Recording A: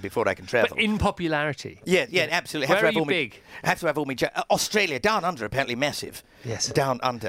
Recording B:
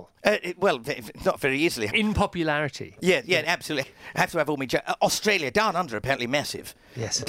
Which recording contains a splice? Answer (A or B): B